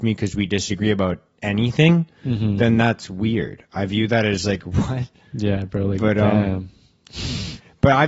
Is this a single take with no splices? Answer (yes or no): yes